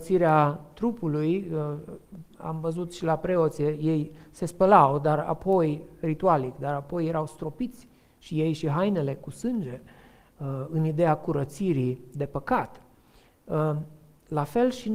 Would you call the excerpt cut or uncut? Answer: uncut